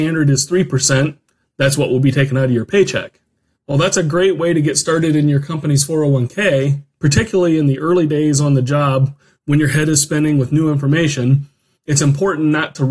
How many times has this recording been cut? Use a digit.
0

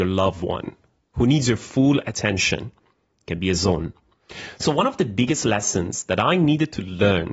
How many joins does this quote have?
1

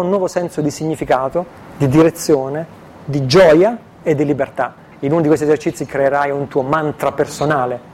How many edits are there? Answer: 1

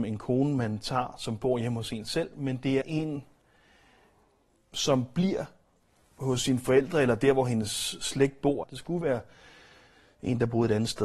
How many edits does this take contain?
2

